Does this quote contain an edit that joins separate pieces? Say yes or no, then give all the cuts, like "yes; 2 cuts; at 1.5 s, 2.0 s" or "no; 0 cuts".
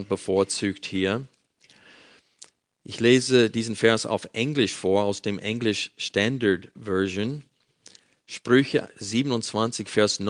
no; 0 cuts